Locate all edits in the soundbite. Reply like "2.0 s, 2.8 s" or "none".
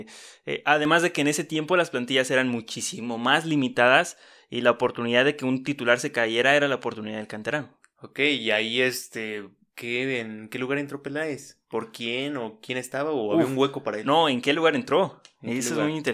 none